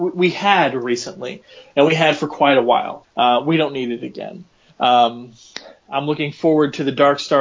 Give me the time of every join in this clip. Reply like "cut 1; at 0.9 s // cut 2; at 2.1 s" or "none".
cut 1; at 3.0 s